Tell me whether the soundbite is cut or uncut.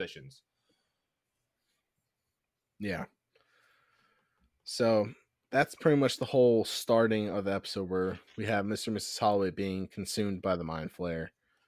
uncut